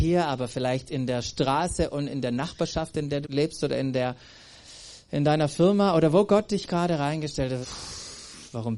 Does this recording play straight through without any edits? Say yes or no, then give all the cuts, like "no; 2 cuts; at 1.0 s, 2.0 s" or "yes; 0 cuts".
no; 2 cuts; at 3.2 s, 7.6 s